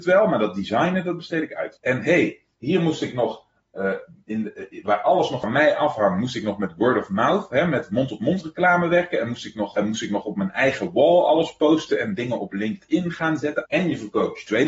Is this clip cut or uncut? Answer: cut